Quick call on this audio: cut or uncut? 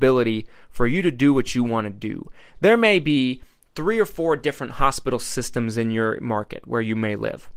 uncut